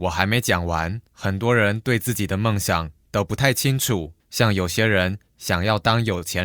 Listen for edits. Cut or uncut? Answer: cut